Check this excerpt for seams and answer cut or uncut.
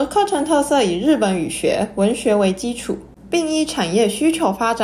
uncut